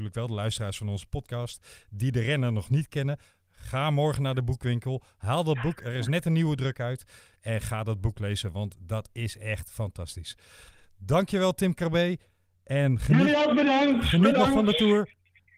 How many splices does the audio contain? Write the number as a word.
zero